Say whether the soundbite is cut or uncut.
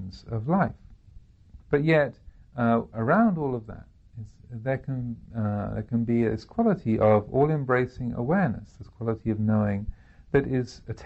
cut